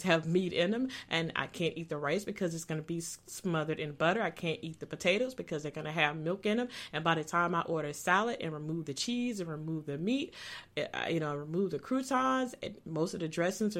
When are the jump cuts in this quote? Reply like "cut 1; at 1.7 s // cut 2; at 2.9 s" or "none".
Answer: none